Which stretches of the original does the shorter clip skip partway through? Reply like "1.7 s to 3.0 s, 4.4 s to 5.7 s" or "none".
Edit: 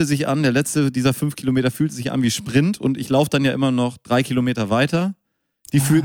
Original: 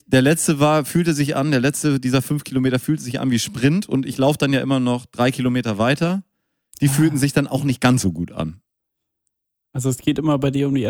none